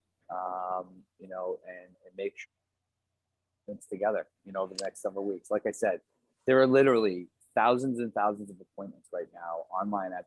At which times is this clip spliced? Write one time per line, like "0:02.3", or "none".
0:01.9